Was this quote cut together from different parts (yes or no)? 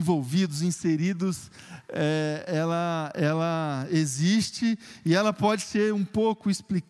yes